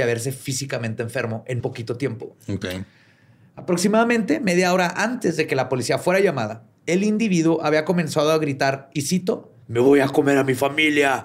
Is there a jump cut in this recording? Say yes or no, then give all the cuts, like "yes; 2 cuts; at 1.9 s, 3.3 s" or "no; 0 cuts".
yes; 2 cuts; at 1.6 s, 9.6 s